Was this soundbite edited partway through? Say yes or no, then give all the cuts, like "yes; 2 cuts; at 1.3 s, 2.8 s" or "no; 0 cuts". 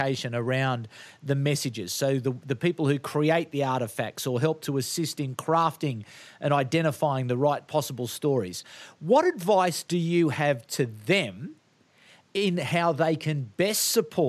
no; 0 cuts